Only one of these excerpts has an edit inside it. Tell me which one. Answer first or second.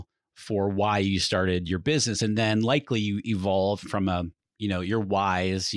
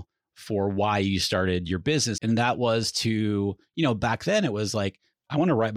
second